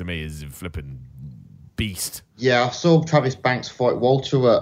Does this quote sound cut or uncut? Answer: uncut